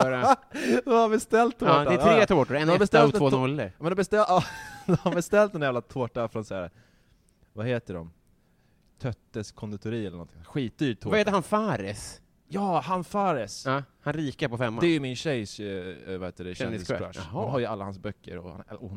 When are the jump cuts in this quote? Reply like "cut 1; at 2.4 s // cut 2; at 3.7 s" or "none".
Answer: none